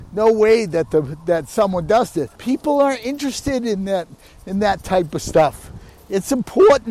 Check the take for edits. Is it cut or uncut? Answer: cut